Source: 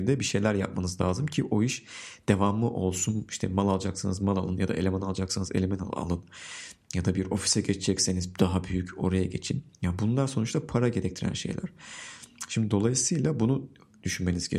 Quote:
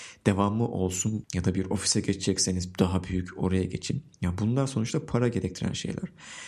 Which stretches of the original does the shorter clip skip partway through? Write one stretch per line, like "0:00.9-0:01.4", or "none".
0:03.3-0:06.8